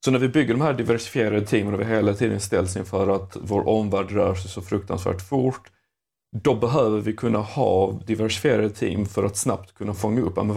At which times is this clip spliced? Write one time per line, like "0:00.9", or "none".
none